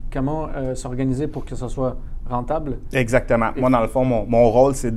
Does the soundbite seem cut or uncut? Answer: uncut